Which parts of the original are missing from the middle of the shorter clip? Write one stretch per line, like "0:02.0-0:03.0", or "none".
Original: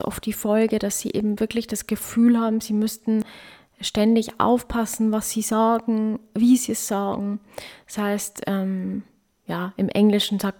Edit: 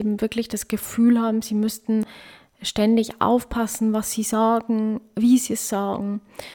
none

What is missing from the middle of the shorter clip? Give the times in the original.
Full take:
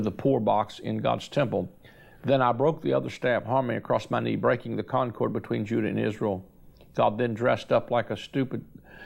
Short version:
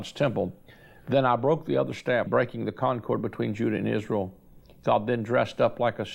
0:03.4-0:04.4

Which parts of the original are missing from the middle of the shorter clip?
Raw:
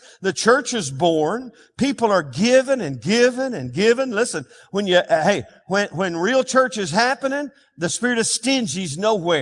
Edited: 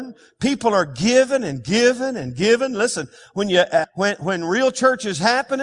0:05.2-0:05.6

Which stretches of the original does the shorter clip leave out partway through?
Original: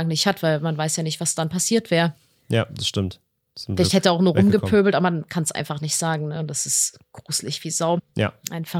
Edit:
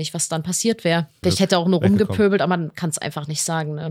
0:02.3-0:03.8

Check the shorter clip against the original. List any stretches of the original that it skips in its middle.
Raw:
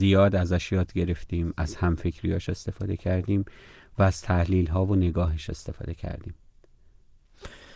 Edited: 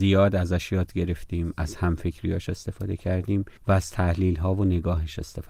0:03.6-0:03.9

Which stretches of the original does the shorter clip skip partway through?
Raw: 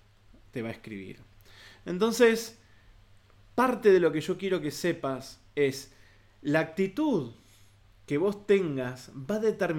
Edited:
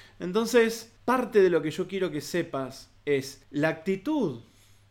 0:02.6-0:03.5
0:05.9-0:06.3

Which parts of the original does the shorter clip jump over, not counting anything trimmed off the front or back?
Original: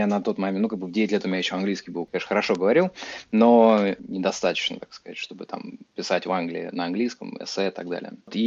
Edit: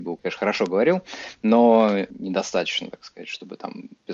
none

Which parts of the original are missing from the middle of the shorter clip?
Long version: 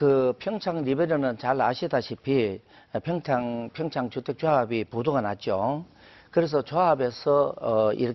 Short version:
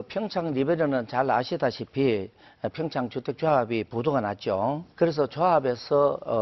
0:03.0-0:03.7
0:05.9-0:06.3

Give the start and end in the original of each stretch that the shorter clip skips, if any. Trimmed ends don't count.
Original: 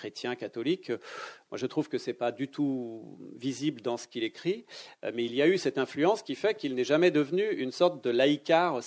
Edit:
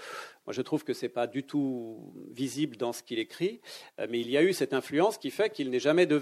none

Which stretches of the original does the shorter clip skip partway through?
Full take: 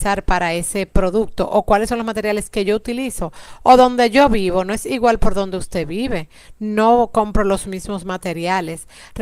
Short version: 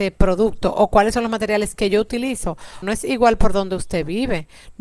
0:03.6-0:04.6

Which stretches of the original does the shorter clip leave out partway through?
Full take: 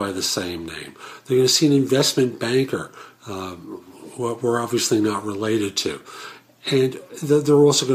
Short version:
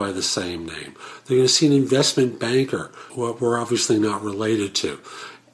0:03.1-0:04.1

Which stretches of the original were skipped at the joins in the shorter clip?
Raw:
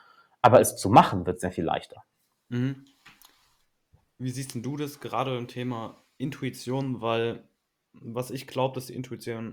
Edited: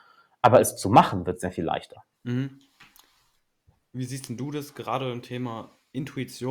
0:02.1-0:02.4

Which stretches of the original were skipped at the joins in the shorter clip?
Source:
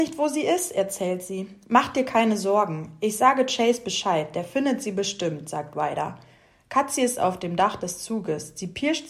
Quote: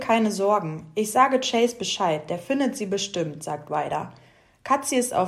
none

